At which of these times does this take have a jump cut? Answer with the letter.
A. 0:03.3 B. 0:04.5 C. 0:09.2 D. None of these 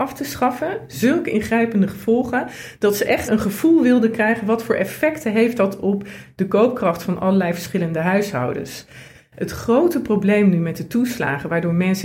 A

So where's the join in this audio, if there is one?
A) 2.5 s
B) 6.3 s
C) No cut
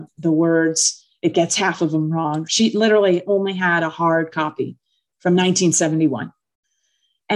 A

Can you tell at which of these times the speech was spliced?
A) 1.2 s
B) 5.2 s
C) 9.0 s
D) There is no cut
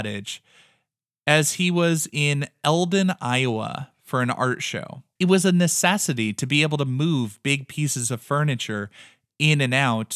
B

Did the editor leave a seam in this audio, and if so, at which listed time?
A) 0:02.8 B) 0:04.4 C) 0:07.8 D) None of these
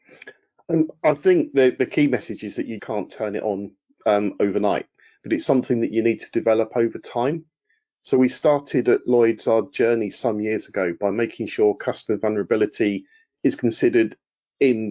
A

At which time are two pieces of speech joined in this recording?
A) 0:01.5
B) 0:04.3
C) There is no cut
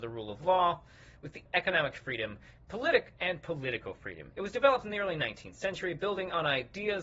A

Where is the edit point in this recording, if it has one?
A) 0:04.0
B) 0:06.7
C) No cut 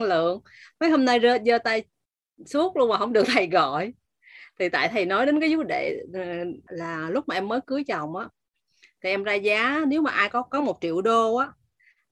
B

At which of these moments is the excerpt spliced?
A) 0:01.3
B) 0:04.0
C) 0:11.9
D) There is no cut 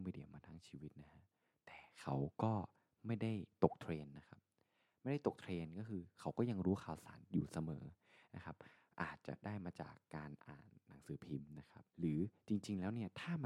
C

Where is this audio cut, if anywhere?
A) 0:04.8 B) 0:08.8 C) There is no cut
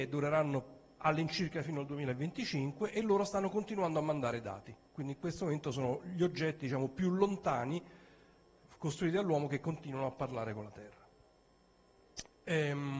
C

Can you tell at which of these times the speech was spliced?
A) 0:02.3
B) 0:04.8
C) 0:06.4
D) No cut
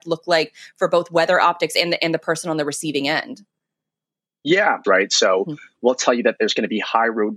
B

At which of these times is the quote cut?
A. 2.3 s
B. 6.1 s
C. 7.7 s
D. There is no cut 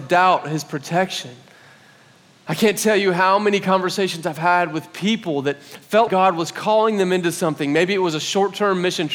B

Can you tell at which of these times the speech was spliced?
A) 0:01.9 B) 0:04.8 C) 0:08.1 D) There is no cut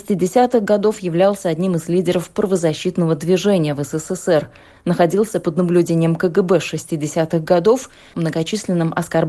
C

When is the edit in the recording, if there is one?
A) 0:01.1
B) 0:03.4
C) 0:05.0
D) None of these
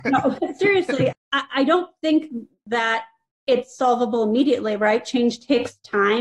A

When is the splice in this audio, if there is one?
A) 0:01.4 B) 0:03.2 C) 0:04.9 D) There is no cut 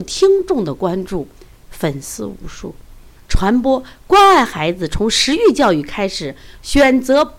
B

